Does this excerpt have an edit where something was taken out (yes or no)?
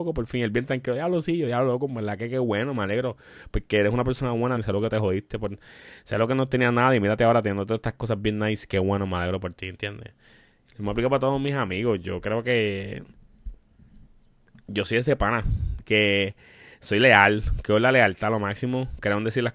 yes